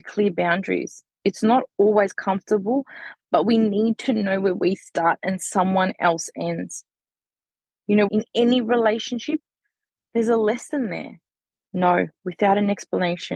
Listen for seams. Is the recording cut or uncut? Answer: cut